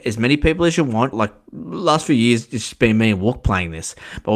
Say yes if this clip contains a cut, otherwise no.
yes